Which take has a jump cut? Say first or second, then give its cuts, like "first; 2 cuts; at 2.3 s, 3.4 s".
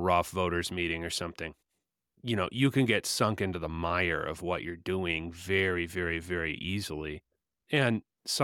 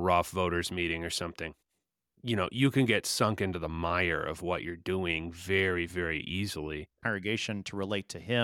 second; 2 cuts; at 5.9 s, 7.0 s